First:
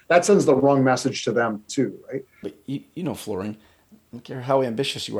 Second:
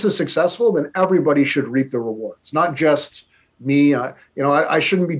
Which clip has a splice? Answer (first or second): first